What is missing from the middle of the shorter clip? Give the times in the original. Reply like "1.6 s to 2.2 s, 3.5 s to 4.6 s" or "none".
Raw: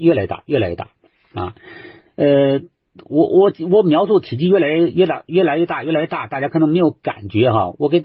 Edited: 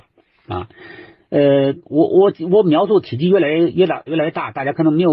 2.7 s to 3.0 s, 5.3 s to 5.8 s